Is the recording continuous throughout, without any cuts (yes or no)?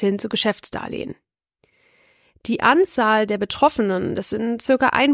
yes